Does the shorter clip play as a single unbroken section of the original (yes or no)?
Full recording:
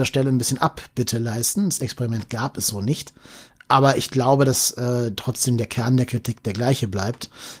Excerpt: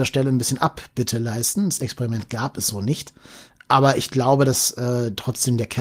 yes